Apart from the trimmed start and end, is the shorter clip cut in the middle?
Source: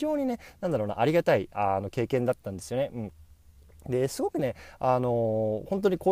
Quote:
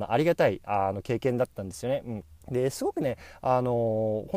yes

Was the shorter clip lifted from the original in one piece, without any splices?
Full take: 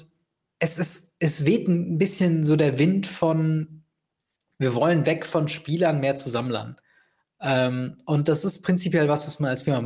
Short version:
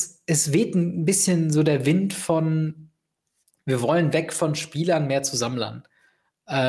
yes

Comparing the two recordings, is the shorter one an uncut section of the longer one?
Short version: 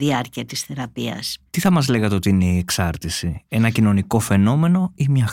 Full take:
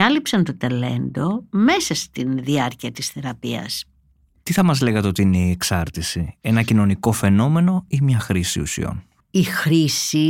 no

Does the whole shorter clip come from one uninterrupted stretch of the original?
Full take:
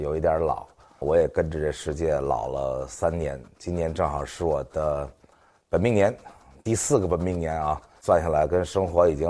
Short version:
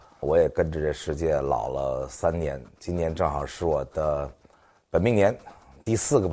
yes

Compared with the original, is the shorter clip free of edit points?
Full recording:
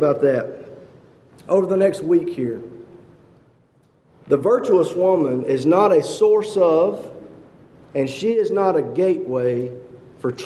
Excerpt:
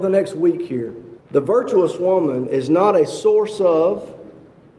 no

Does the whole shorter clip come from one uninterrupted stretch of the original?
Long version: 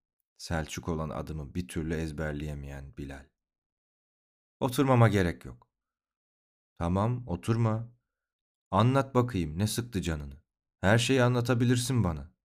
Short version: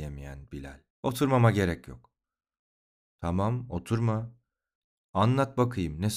no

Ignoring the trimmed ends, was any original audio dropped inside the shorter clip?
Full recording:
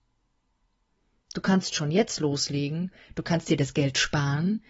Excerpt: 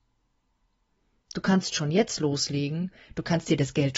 no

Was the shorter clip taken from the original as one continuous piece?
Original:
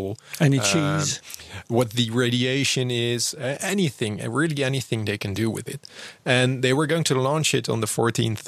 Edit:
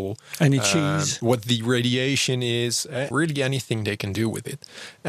no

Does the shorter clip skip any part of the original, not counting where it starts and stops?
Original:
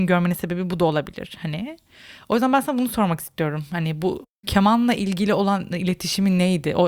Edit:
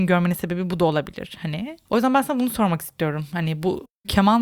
yes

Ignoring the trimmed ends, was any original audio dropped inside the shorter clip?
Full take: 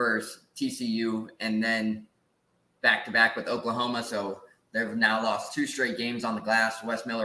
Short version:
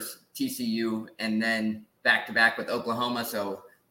yes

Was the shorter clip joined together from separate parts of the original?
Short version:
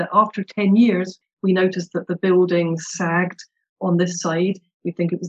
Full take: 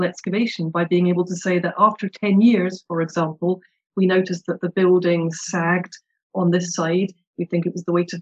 yes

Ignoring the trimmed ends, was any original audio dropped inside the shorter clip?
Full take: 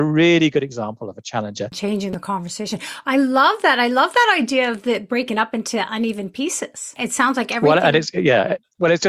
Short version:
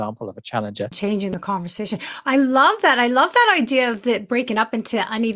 no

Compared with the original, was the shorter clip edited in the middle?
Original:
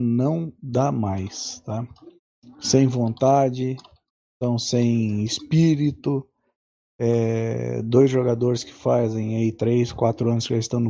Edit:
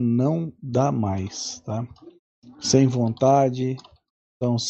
no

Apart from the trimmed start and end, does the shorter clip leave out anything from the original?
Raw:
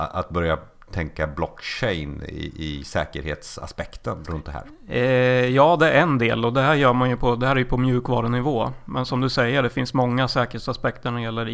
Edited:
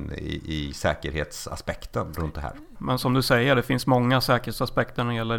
yes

